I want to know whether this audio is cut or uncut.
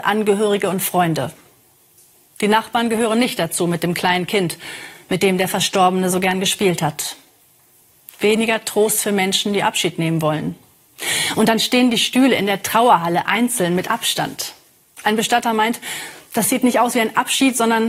uncut